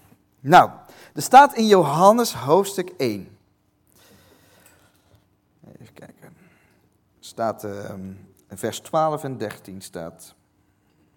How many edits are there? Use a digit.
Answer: 0